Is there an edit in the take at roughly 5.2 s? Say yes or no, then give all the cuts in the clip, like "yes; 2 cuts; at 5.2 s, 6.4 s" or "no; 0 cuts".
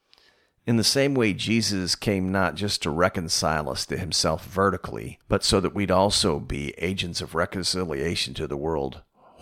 yes; 1 cut; at 5.2 s